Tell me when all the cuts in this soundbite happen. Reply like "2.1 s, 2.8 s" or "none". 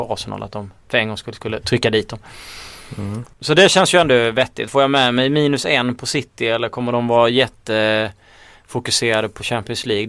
3.3 s, 4.7 s

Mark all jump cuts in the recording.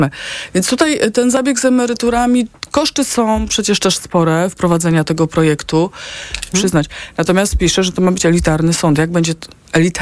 6.5 s

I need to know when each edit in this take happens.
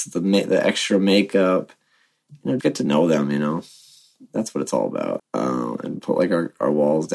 2.6 s, 5.2 s

